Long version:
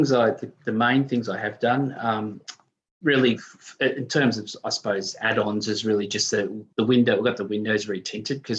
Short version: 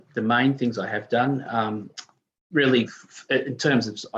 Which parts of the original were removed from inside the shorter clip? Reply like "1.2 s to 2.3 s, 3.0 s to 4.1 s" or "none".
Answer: none